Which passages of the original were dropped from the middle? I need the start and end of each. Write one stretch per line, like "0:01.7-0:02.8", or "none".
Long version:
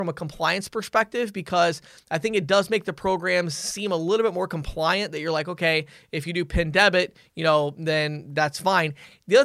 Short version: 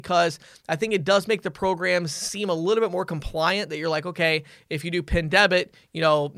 none